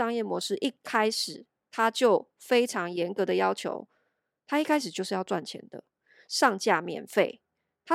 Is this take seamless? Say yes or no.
no